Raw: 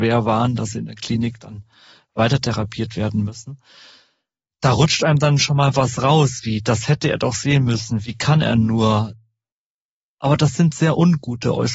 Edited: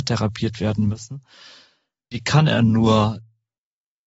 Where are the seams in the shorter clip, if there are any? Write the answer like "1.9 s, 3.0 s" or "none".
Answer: 2.1 s